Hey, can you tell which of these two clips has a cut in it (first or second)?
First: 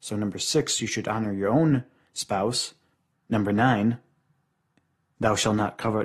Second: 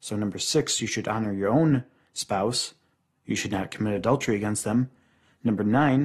first